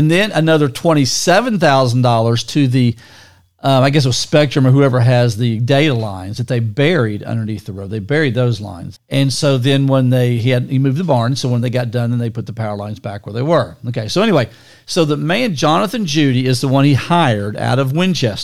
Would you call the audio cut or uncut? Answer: cut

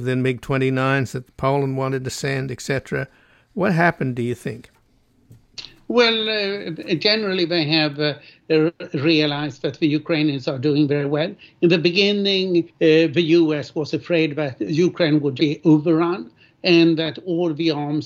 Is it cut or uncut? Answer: cut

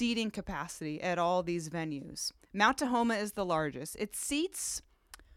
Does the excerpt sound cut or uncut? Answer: uncut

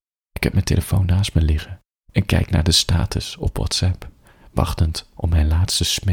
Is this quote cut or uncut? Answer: uncut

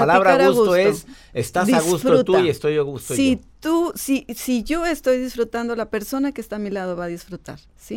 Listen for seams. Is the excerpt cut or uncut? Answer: uncut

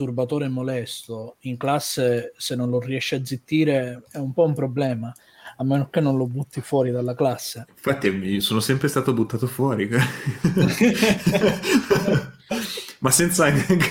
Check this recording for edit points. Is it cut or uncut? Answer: uncut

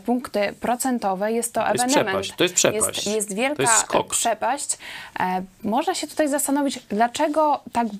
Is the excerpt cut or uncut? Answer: uncut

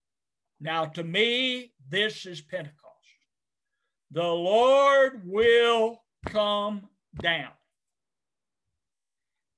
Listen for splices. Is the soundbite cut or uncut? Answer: uncut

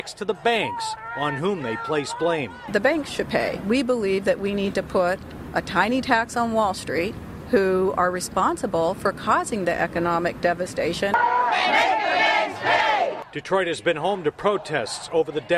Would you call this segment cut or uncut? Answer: uncut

